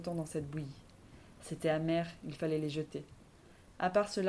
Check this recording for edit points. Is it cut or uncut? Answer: uncut